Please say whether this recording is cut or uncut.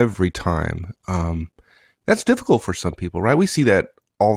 uncut